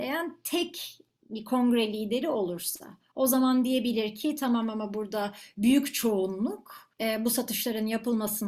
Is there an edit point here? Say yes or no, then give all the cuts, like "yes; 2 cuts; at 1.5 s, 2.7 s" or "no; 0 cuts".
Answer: yes; 1 cut; at 6.9 s